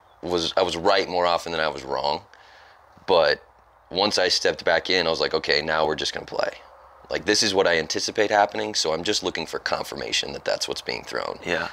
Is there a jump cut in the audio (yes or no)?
no